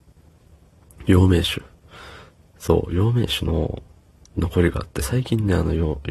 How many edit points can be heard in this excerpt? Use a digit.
0